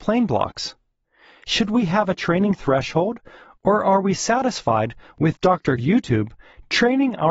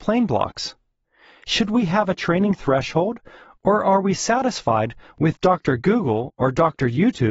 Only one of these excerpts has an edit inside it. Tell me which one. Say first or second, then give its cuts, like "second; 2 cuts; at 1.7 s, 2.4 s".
first; 1 cut; at 5.8 s